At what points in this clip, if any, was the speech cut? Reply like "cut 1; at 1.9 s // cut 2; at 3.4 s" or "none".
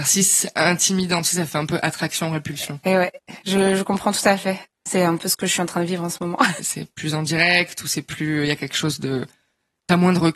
cut 1; at 6.6 s